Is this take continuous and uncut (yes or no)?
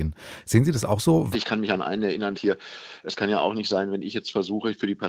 no